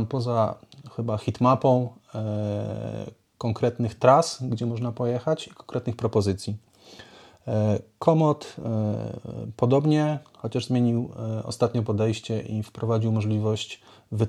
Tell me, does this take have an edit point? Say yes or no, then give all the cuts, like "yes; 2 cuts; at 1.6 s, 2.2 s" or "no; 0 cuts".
no; 0 cuts